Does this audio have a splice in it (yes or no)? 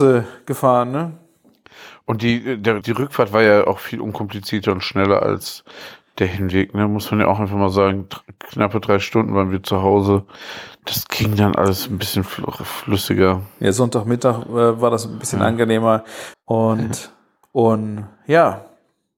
yes